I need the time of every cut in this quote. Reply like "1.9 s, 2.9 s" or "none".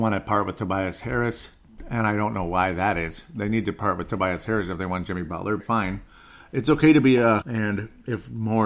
5.6 s, 7.4 s